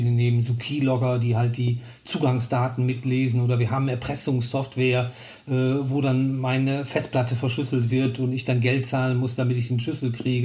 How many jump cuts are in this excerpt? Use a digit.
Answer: 0